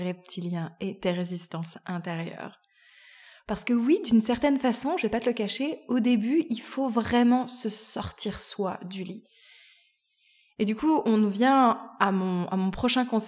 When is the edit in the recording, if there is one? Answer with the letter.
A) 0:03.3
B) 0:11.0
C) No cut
C